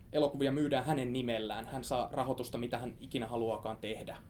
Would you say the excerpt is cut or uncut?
uncut